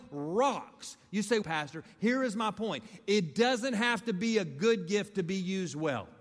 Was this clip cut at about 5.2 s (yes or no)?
no